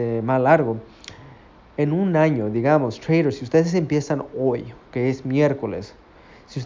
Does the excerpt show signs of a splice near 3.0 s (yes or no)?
no